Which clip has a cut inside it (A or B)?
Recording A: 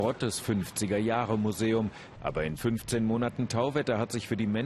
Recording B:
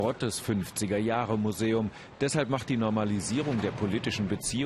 A